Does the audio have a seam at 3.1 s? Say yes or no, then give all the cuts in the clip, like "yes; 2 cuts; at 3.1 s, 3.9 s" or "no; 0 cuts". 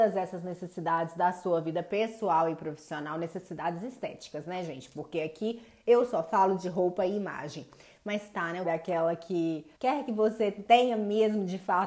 no; 2 cuts; at 8.6 s, 9.8 s